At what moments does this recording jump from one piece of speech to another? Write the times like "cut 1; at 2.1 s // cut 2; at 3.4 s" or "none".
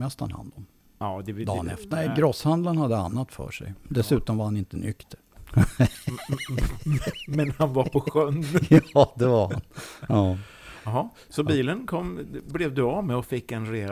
cut 1; at 1.9 s